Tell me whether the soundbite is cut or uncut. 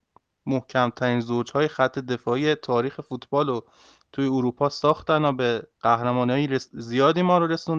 cut